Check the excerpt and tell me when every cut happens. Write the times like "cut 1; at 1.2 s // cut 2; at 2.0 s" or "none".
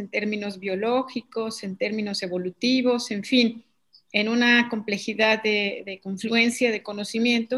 none